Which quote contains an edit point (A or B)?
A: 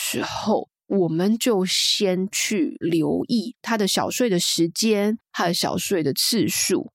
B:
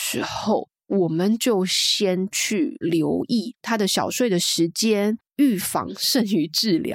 B